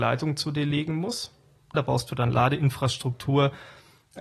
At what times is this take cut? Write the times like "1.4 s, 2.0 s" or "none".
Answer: 1.7 s

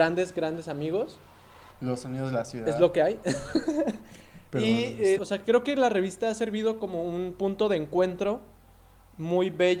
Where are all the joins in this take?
1.7 s, 5.2 s

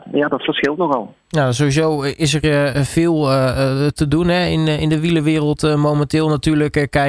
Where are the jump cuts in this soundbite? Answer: 1.2 s

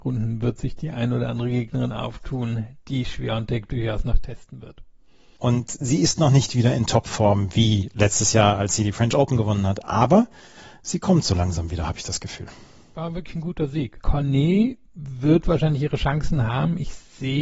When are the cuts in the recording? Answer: 5.4 s, 14.0 s

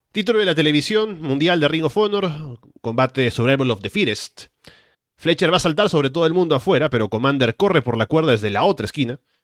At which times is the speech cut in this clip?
4.9 s

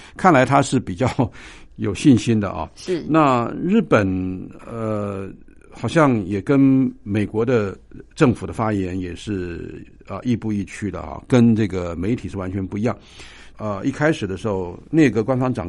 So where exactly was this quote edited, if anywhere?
13.5 s

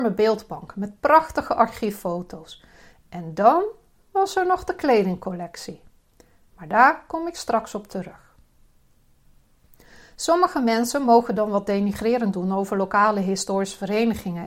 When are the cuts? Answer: none

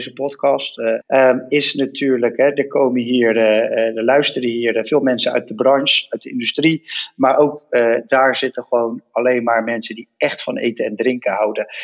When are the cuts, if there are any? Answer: 1.0 s

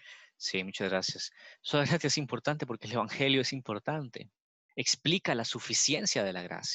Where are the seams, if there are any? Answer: 4.7 s

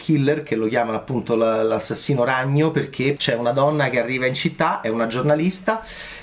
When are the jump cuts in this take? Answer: 3.2 s

